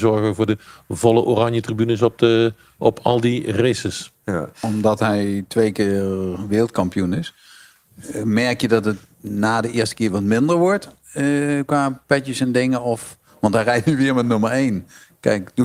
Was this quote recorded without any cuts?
yes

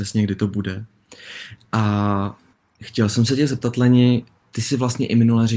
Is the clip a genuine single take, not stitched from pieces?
yes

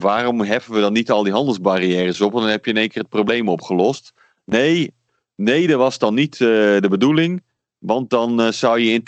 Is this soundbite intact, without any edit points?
yes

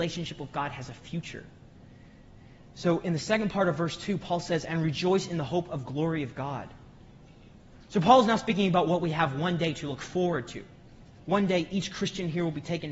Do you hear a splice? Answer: no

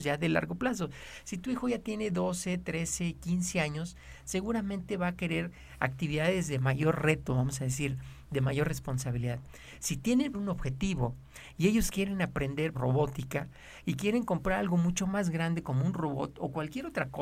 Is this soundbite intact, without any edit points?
no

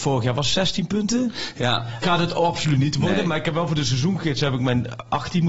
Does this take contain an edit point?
yes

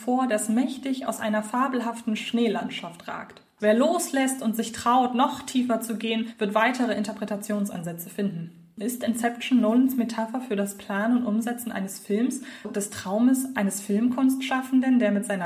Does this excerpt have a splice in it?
yes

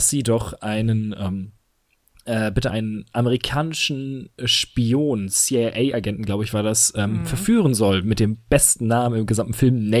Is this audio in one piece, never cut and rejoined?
yes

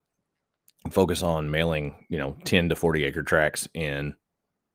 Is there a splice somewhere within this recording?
no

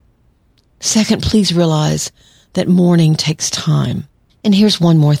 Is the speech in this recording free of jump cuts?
no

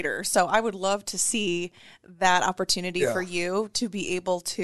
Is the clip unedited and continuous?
yes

